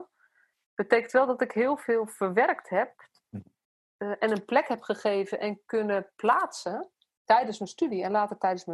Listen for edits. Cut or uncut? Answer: uncut